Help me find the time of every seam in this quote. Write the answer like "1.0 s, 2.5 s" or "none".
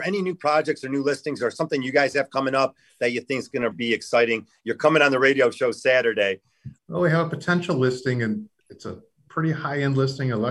3.7 s, 6.8 s